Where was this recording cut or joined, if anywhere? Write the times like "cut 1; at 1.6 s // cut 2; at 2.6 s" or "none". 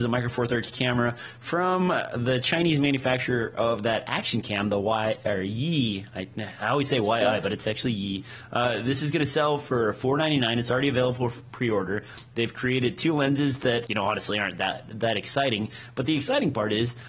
cut 1; at 13.9 s